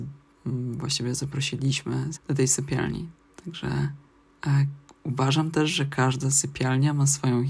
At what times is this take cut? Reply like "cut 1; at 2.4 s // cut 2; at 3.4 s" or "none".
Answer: cut 1; at 2.1 s